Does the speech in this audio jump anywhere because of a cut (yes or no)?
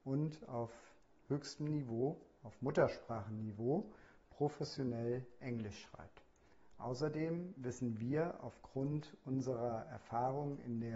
no